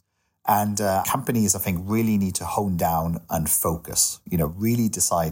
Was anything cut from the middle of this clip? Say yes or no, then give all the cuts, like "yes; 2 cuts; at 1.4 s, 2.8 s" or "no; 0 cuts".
yes; 1 cut; at 1.0 s